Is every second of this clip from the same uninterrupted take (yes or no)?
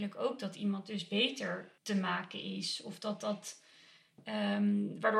no